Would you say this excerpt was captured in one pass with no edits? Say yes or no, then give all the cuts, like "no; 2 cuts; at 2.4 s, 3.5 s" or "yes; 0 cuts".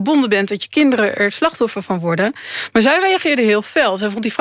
yes; 0 cuts